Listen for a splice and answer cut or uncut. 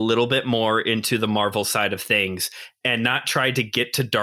uncut